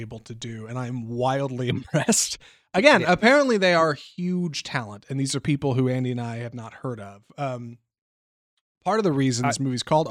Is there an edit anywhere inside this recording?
no; 0 cuts

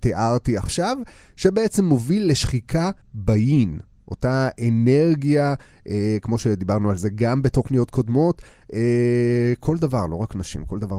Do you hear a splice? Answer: yes; 1 cut; at 3.0 s

